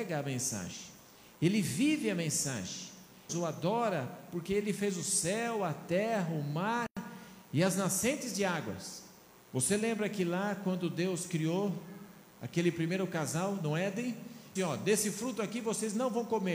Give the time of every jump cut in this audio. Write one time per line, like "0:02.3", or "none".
0:03.3
0:09.4
0:14.6